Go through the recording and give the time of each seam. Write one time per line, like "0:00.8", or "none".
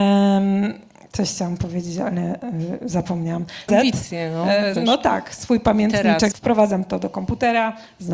0:03.7
0:04.8
0:06.3